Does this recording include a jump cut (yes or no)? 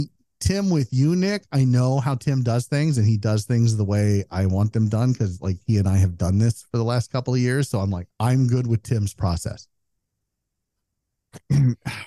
yes